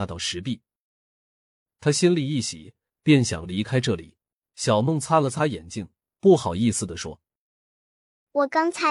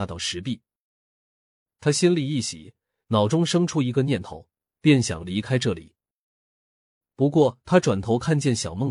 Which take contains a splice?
first; 2 cuts; at 2.9 s, 4.4 s

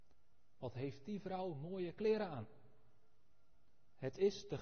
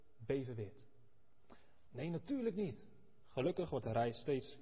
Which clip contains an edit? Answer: second; 2 cuts; at 1.9 s, 3.2 s

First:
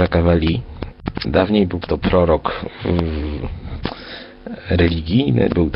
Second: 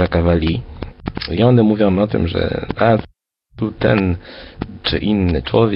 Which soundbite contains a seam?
first; 1 cut; at 1.2 s

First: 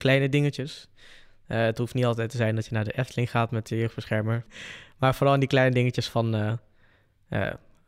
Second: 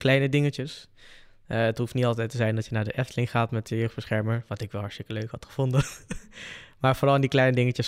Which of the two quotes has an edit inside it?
first; 1 cut; at 4.5 s

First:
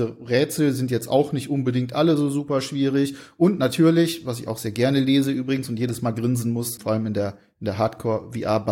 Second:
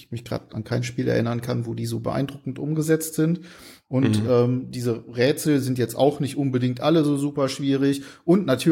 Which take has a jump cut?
first; 1 cut; at 6.8 s

